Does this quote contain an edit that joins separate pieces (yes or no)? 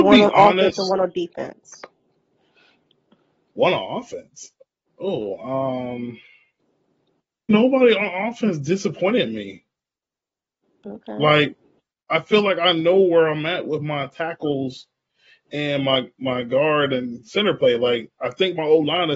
yes